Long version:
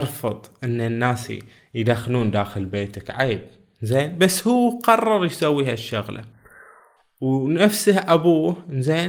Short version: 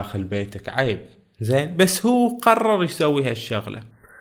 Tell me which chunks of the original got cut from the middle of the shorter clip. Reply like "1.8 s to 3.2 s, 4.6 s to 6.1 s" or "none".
none